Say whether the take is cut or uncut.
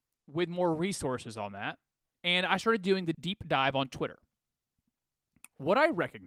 cut